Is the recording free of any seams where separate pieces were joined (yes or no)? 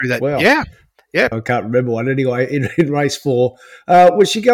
no